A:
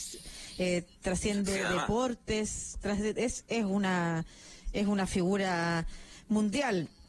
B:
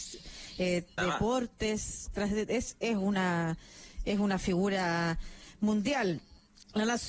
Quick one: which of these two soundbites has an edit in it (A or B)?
B